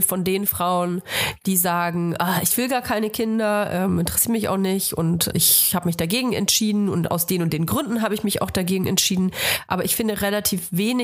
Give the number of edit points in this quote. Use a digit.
1